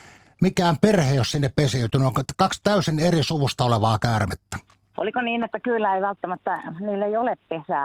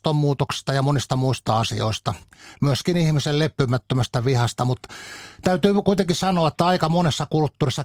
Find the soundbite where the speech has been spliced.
first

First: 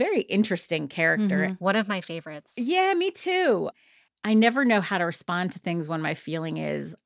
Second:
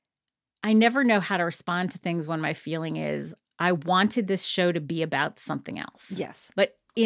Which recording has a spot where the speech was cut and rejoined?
first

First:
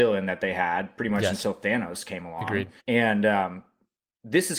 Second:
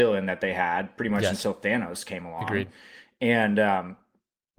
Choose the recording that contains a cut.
first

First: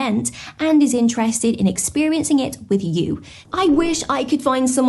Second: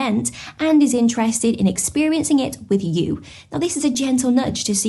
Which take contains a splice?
first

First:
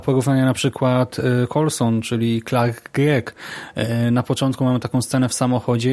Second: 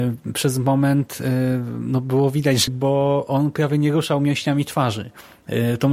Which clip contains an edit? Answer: second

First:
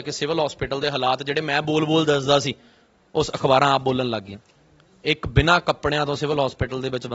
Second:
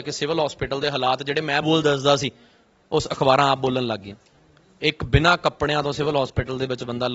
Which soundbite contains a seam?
second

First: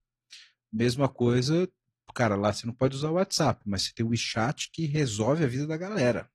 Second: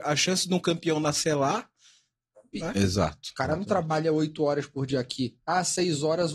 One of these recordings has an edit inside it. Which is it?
second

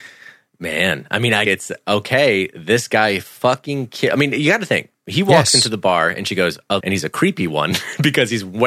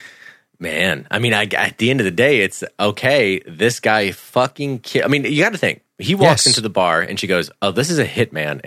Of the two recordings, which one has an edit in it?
first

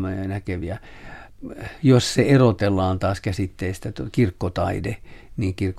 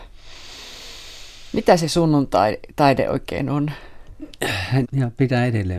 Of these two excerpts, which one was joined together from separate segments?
second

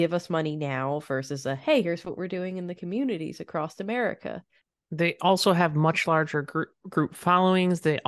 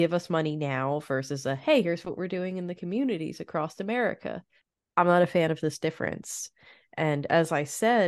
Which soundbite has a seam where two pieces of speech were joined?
first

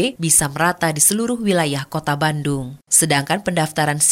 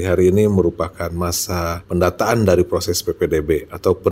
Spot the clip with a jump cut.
first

